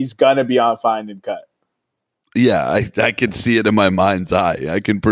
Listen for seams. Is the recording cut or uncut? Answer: uncut